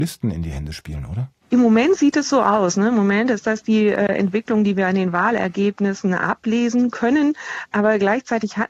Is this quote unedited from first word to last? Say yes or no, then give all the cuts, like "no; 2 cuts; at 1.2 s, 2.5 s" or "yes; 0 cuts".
yes; 0 cuts